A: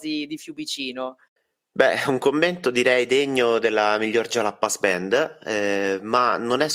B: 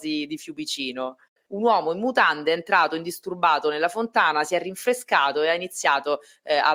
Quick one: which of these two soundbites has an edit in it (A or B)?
B